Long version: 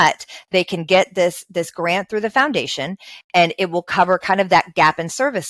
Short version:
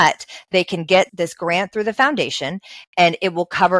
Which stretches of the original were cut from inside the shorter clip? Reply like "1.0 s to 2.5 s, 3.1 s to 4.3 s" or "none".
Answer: 1.1 s to 1.5 s